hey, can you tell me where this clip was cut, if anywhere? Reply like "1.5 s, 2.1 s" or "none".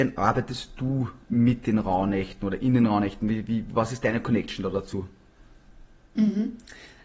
1.2 s